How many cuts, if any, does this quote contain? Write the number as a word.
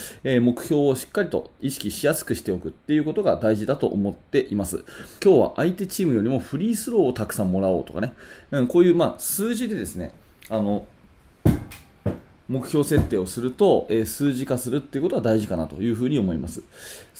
two